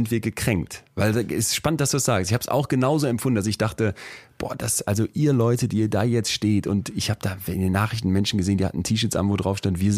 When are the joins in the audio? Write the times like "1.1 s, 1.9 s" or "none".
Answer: none